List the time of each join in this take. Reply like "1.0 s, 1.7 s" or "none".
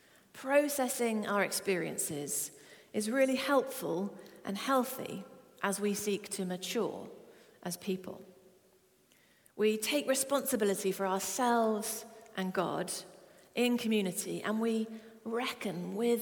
none